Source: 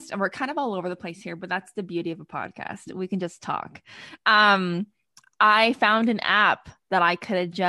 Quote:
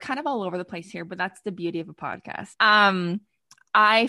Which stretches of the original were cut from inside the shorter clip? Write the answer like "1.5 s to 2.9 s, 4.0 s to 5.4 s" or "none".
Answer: 2.8 s to 4.2 s